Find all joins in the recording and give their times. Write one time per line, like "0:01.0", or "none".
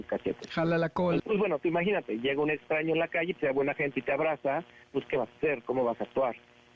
0:01.2
0:03.3